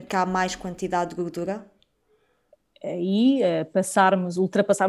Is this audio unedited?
yes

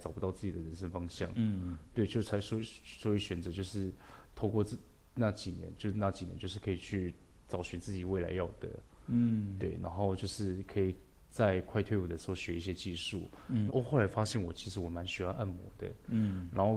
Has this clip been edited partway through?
yes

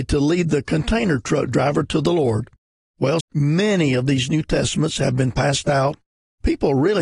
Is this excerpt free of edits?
no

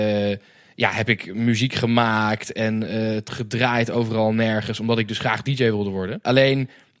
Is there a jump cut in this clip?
no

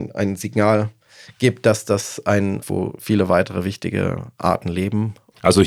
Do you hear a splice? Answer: yes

